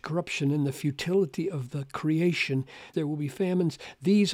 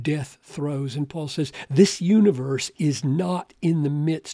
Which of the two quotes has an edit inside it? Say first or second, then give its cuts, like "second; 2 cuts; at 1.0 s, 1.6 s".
first; 1 cut; at 2.9 s